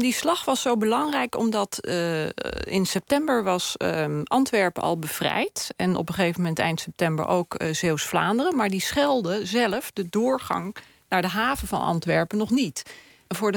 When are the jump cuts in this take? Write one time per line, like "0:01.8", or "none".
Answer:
none

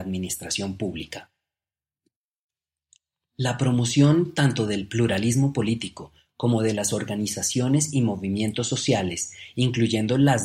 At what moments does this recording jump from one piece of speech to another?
none

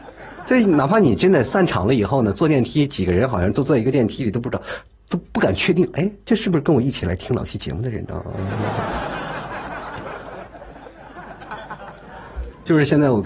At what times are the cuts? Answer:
none

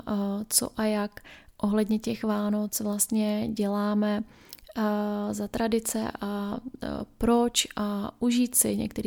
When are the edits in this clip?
none

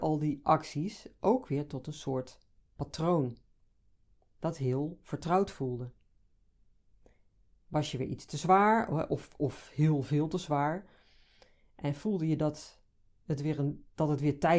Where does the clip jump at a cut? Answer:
none

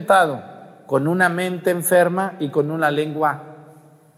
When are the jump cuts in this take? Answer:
none

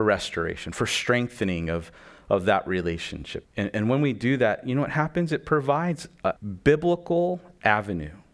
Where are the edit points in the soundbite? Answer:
0:03.4
0:06.4

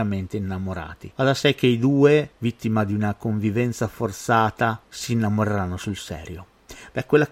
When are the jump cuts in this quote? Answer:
none

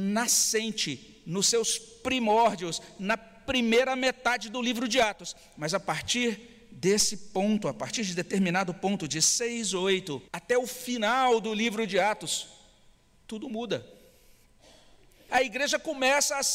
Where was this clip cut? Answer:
0:10.3
0:15.3

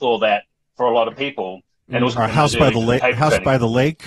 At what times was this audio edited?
0:02.2

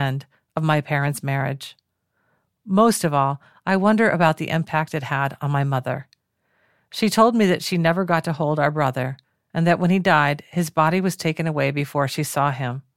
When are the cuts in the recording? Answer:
none

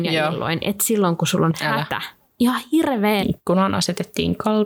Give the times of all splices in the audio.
0:03.2

